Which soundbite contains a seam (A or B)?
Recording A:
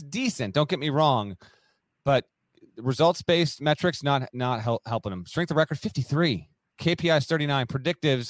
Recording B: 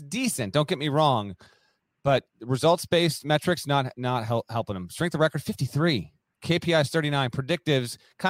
B